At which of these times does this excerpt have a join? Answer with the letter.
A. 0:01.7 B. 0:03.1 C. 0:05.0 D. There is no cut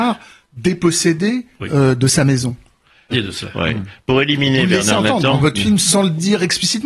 B